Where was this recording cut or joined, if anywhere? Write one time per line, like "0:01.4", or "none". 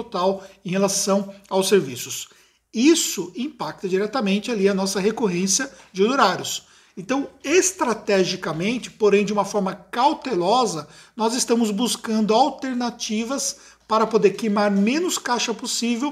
none